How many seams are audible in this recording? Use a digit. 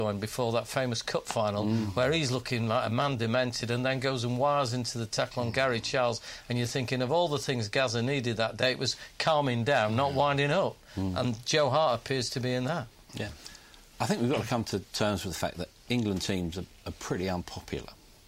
0